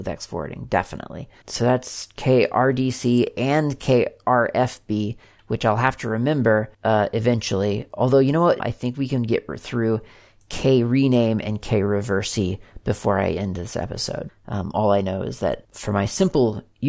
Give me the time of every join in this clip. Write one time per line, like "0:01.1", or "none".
0:01.4
0:08.6
0:14.3